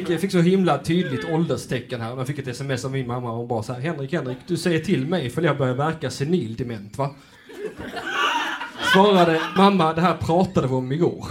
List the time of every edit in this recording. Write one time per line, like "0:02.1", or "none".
0:09.6